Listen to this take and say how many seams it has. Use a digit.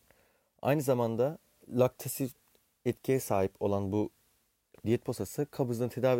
0